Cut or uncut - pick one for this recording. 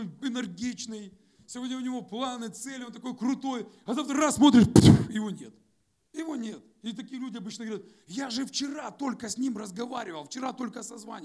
cut